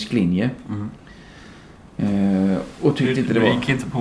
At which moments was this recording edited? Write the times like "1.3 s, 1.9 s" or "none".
none